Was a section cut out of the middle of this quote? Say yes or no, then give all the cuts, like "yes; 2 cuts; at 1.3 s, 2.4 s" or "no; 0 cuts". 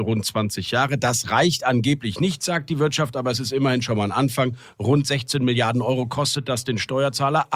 no; 0 cuts